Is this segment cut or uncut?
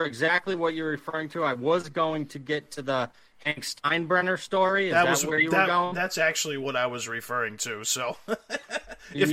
uncut